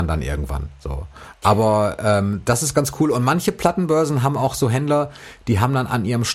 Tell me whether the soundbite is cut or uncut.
uncut